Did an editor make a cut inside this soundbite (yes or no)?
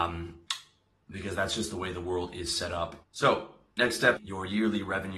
yes